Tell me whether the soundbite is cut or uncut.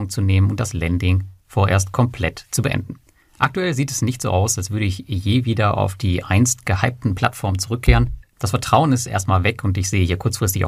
uncut